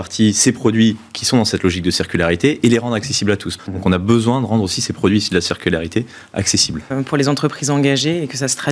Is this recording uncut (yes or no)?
no